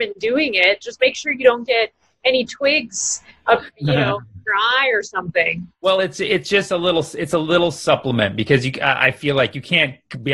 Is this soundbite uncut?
yes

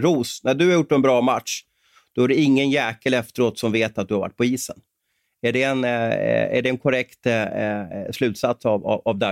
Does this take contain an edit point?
no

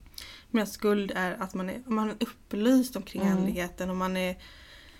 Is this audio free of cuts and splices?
yes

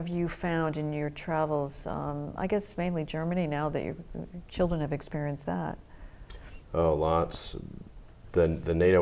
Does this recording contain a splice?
no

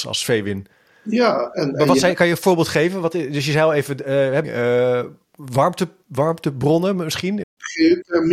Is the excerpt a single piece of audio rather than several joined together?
no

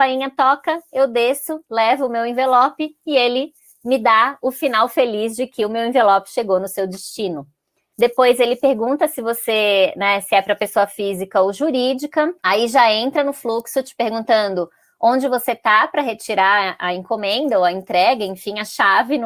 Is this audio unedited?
no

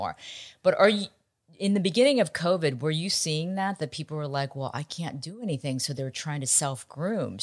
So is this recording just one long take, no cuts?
yes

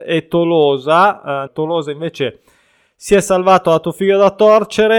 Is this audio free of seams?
no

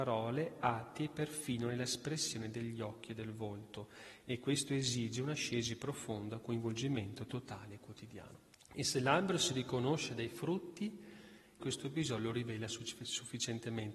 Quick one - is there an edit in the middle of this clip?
yes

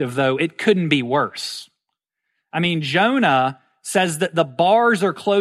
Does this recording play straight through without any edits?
yes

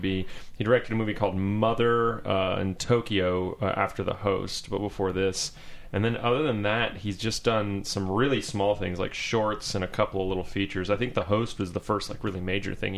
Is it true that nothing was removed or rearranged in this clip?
yes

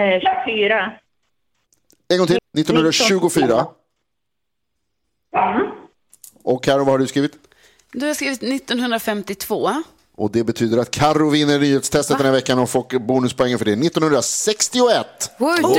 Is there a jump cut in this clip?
yes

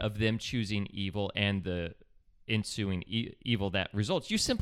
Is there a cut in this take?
no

